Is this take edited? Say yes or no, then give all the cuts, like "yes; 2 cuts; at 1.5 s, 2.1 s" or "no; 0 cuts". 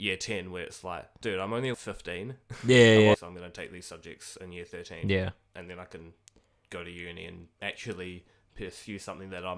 yes; 2 cuts; at 1.7 s, 3.1 s